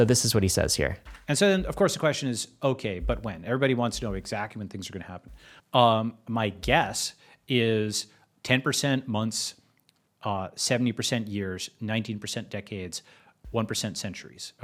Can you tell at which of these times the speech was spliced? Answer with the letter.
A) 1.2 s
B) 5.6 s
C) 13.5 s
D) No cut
B